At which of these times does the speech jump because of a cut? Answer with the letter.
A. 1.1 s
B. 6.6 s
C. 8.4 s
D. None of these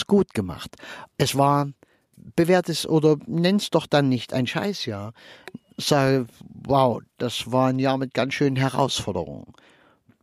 A